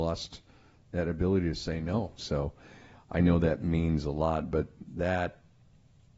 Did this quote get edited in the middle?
yes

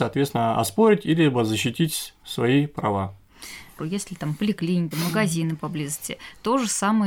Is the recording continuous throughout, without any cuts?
no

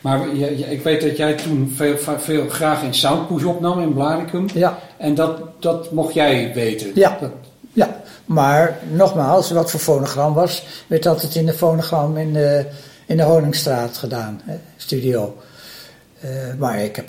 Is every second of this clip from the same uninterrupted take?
yes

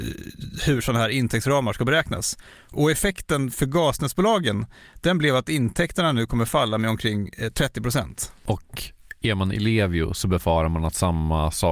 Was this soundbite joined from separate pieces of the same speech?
no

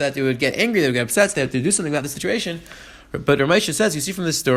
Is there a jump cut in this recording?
no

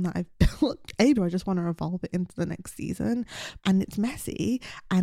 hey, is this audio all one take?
no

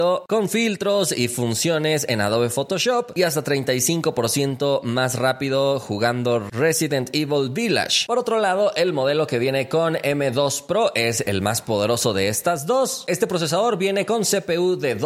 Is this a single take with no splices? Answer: yes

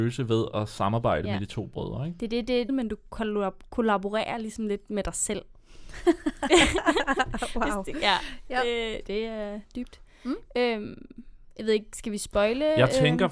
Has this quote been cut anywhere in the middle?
yes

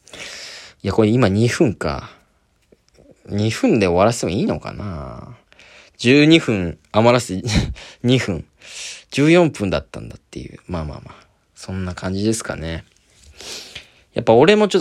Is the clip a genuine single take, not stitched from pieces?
yes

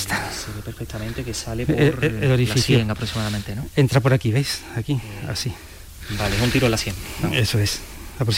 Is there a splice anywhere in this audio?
no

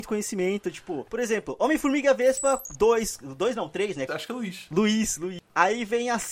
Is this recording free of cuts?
no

